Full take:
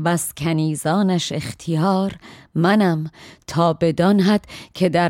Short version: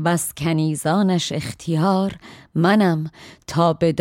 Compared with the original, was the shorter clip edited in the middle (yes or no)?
no